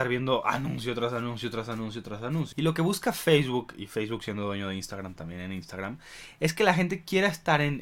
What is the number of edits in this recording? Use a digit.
1